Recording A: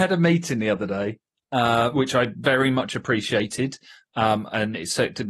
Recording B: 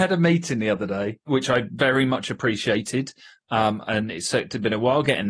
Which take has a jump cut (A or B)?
B